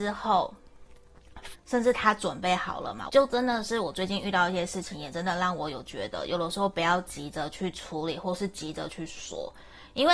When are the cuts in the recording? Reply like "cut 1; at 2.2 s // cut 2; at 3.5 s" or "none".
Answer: cut 1; at 1.5 s // cut 2; at 3.1 s